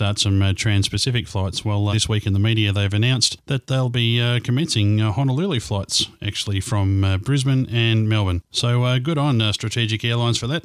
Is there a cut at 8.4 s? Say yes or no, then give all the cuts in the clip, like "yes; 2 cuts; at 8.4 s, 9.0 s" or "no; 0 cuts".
no; 1 cut; at 1.9 s